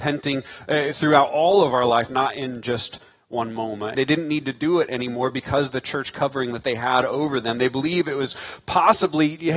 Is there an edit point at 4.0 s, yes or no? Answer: yes